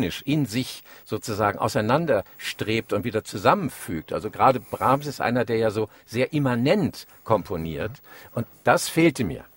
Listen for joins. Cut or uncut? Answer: cut